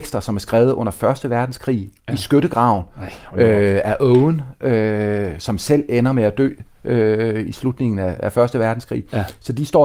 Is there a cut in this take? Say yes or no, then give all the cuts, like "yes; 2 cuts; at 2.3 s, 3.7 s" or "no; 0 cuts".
no; 0 cuts